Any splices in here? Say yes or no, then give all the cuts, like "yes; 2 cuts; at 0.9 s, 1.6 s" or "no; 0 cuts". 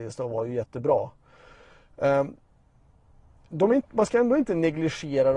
no; 0 cuts